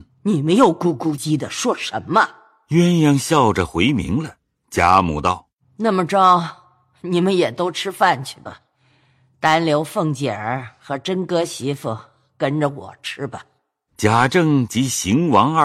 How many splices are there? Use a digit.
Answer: 1